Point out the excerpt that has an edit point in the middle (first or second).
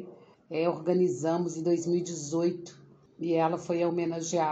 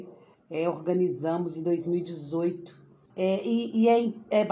second